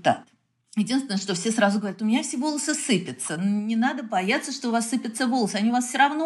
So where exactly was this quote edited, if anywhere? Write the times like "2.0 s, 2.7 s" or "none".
none